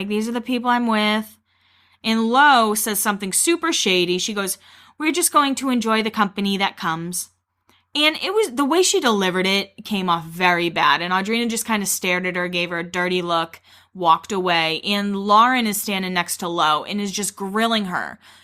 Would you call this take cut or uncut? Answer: uncut